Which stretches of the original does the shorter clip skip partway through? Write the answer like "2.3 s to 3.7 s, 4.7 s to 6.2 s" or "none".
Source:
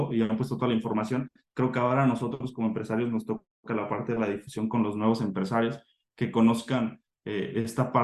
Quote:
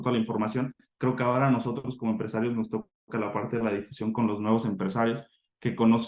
none